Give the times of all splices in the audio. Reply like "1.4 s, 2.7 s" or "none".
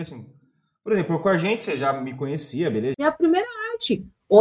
2.9 s